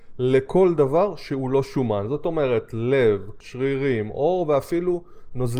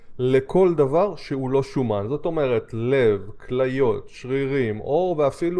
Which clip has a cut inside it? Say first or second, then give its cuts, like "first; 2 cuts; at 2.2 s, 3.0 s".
first; 1 cut; at 3.4 s